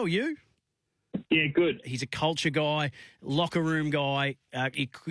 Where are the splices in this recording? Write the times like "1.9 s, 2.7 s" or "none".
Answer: 1.8 s